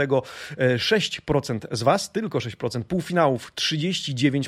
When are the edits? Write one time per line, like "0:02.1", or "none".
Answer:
none